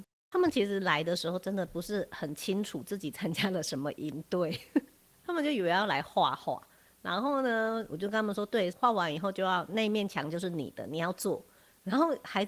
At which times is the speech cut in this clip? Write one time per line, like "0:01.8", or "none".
0:08.7